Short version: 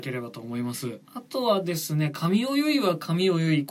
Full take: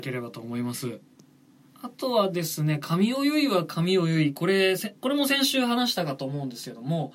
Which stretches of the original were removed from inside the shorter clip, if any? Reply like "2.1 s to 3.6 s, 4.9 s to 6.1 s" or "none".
1.0 s to 1.7 s